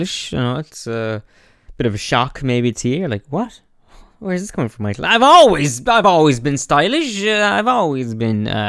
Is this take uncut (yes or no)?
yes